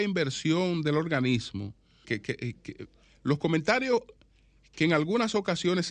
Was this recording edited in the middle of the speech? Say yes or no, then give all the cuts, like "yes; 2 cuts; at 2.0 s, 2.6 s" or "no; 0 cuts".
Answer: yes; 1 cut; at 2.0 s